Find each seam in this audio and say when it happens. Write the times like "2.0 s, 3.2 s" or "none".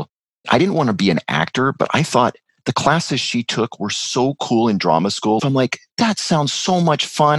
5.4 s